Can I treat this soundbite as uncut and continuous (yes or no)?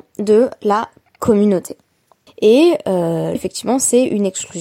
no